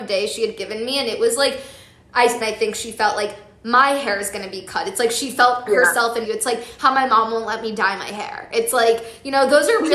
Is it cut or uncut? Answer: cut